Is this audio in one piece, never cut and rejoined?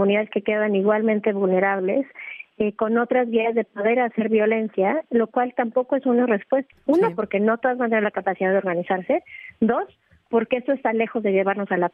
no; 1 cut; at 6.7 s

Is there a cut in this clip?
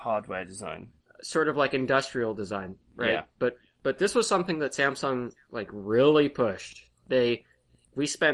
no; 0 cuts

